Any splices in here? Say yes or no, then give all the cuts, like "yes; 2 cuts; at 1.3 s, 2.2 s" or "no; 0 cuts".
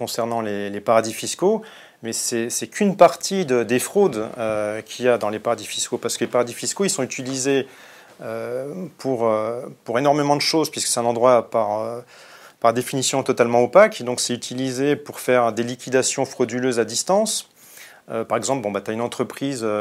no; 0 cuts